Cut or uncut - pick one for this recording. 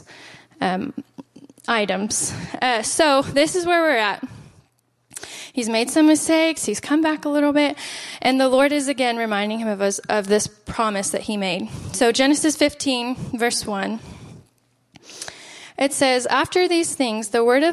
uncut